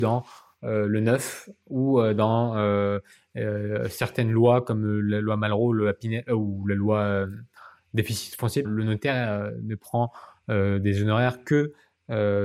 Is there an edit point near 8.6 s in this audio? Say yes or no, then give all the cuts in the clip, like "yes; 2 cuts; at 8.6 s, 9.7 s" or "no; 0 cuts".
yes; 1 cut; at 8.6 s